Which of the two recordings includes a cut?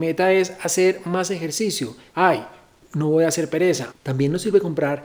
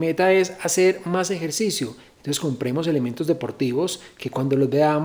first; 2 cuts; at 2.1 s, 3.9 s

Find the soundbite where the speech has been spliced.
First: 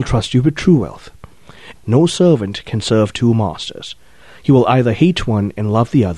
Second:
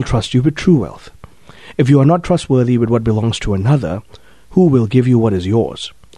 first; 1 cut; at 1.8 s

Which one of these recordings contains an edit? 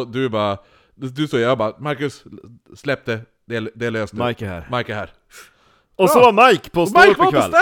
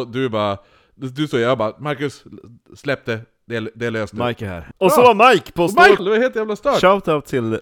second; 2 cuts; at 4.7 s, 6.0 s

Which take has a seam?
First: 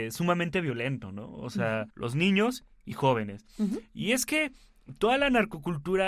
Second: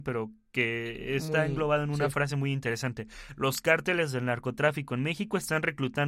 first; 1 cut; at 1.9 s

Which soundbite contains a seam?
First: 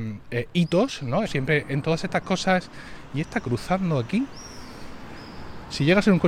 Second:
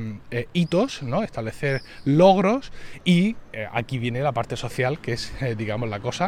first; 1 cut; at 1.2 s

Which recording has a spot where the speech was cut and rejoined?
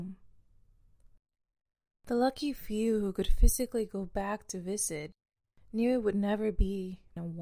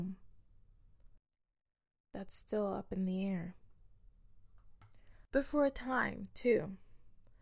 second; 2 cuts; at 1.9 s, 5.3 s

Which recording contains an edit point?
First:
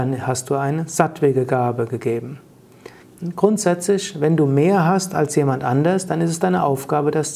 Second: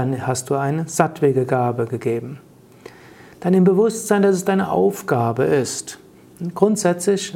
first; 1 cut; at 3.0 s

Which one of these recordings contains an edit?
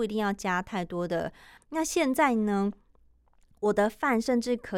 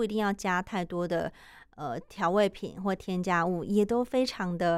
first; 1 cut; at 1.6 s

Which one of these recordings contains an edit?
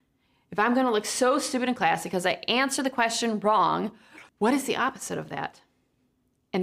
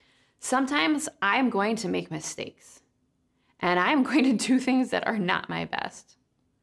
first; 1 cut; at 4.3 s

